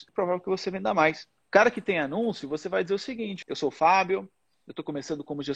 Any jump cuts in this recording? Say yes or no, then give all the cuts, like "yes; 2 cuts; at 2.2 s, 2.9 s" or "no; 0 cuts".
yes; 2 cuts; at 1.4 s, 3.4 s